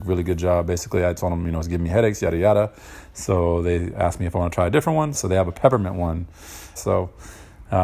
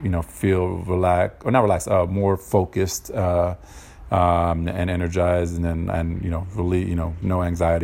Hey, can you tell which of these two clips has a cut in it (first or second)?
first